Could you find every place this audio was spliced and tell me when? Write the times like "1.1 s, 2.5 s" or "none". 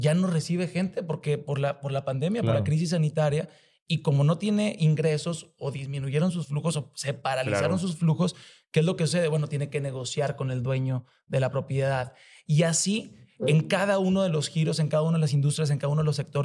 none